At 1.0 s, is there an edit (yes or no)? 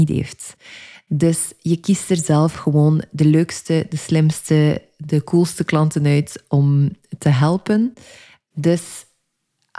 no